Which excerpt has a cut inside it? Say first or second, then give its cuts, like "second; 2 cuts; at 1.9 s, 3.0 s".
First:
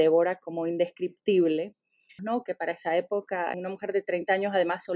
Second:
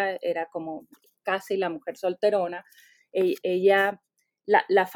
first; 2 cuts; at 2.2 s, 3.5 s